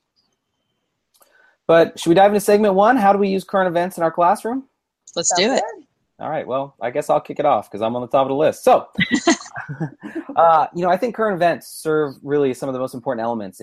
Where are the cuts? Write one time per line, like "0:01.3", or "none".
none